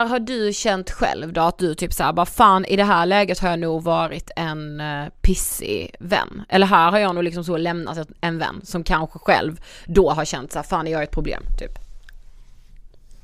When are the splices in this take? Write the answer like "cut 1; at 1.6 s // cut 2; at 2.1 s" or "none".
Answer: none